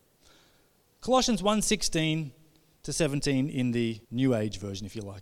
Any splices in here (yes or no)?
yes